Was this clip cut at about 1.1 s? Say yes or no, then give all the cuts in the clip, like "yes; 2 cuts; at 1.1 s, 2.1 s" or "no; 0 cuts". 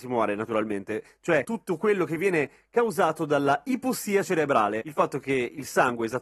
no; 0 cuts